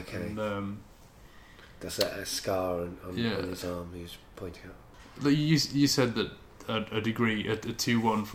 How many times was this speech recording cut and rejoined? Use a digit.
0